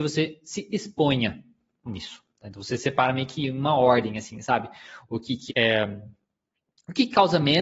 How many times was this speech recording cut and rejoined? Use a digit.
1